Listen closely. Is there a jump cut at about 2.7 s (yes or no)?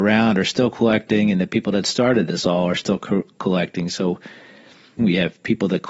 no